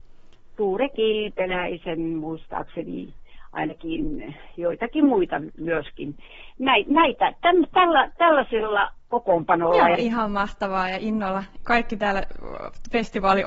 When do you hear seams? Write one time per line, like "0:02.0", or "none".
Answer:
0:10.0
0:11.6